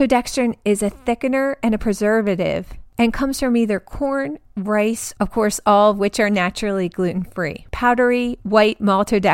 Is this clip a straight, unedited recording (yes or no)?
no